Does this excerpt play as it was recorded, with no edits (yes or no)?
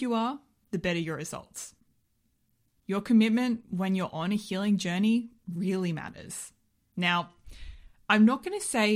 yes